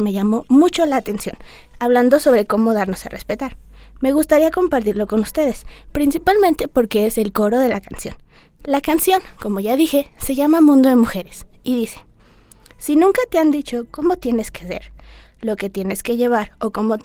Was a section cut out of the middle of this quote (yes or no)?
no